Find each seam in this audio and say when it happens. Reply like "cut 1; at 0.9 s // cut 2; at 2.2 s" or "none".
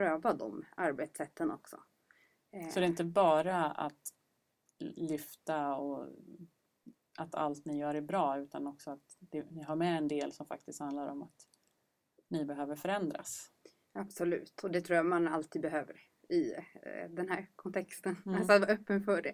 none